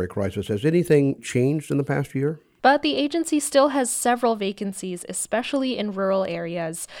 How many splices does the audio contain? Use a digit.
2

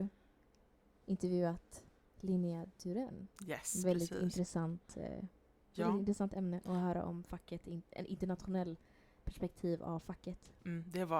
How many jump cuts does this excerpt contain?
1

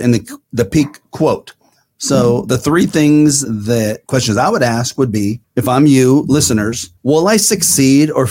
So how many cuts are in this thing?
1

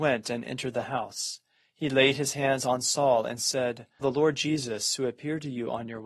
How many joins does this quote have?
1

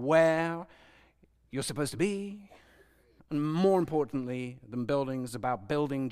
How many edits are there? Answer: 1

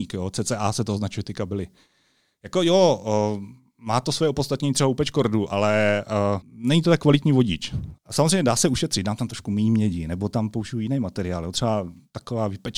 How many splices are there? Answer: 2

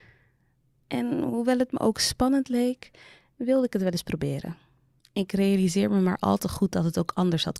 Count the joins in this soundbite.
1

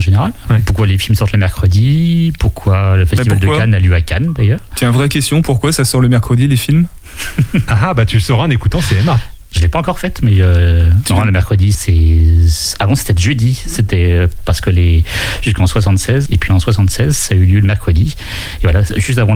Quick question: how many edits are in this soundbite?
2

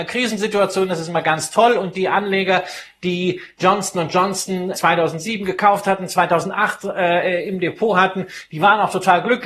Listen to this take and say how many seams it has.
1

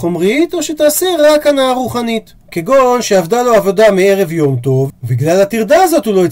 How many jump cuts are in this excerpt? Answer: 2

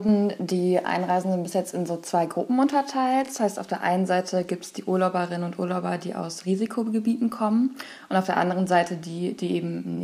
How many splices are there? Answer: 0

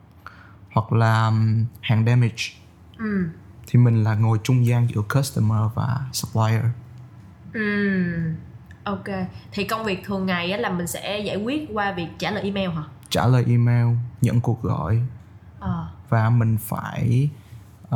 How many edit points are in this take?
0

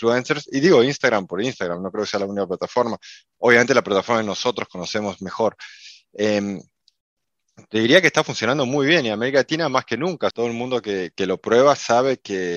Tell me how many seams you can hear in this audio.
1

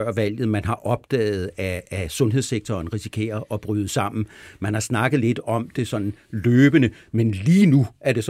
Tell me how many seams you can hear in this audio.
0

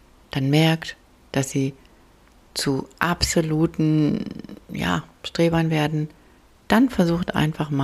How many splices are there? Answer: 0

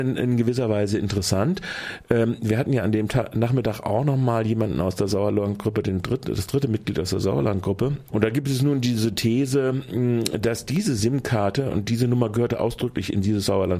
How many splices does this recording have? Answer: 1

